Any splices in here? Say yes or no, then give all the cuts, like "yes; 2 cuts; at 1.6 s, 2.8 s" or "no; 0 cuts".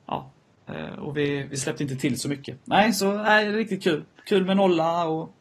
no; 0 cuts